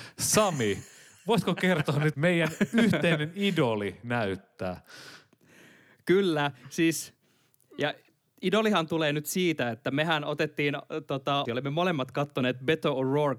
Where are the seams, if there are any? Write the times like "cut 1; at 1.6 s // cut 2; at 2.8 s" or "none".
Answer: cut 1; at 2.1 s // cut 2; at 11.5 s